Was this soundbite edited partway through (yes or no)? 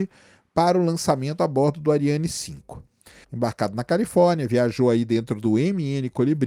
yes